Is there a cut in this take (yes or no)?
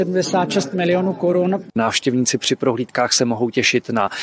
yes